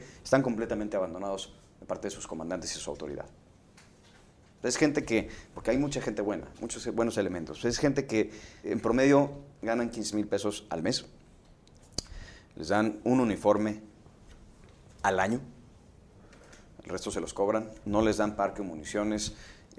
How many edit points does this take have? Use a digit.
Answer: 2